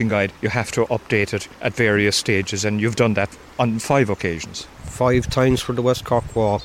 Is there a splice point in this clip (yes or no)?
no